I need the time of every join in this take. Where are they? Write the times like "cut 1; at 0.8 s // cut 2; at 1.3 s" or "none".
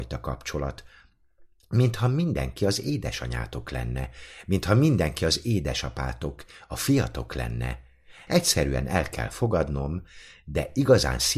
cut 1; at 8.3 s